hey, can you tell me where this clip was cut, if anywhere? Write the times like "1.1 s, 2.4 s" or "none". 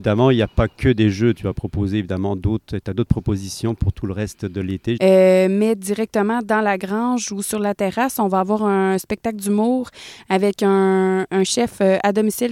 5.0 s, 11.3 s

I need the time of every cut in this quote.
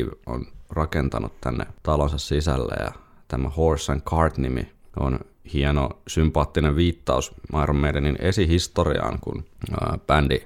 none

